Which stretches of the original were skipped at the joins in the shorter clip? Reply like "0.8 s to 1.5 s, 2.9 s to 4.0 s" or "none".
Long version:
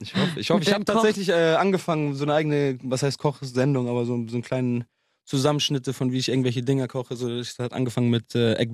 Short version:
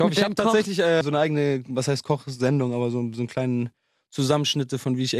1.5 s to 2.2 s